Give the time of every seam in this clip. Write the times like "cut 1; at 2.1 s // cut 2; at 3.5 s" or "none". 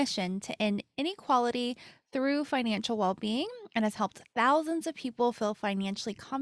none